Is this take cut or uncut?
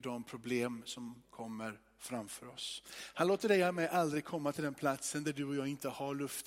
cut